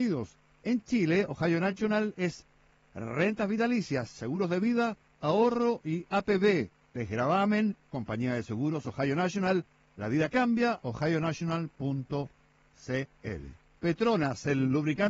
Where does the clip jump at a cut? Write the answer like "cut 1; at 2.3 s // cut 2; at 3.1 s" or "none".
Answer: cut 1; at 7.9 s // cut 2; at 10.8 s